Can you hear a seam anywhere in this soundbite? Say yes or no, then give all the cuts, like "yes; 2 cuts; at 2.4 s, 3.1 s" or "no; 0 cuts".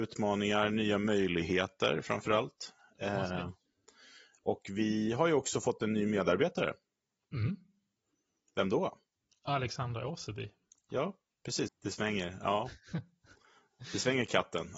yes; 1 cut; at 11.7 s